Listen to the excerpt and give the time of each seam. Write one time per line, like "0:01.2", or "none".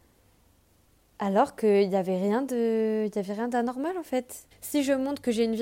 0:04.5